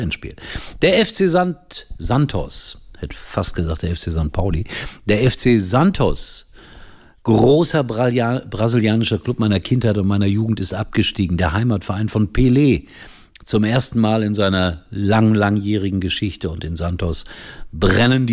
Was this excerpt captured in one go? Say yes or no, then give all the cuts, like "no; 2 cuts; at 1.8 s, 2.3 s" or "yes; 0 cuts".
yes; 0 cuts